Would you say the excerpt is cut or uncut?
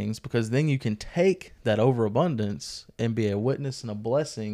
uncut